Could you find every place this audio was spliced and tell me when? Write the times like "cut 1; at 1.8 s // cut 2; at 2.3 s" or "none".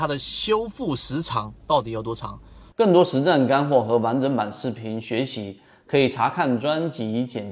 cut 1; at 2.7 s